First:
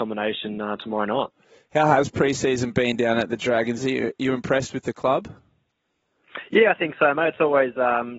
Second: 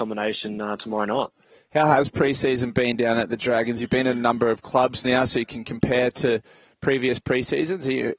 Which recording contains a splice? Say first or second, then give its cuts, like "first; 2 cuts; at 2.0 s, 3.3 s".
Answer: first; 1 cut; at 3.8 s